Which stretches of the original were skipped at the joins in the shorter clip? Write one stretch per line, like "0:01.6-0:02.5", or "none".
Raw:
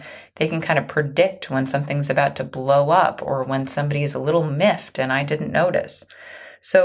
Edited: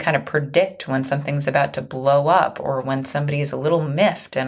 none